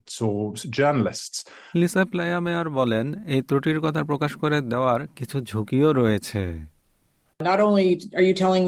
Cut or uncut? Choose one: cut